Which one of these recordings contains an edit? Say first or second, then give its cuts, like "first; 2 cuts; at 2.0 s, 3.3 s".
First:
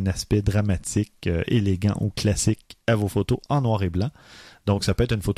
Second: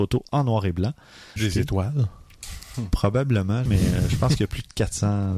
second; 2 cuts; at 1.4 s, 3.7 s